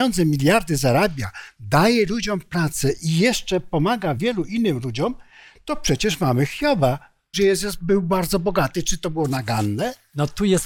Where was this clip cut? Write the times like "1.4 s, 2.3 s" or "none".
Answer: 4.2 s, 7.3 s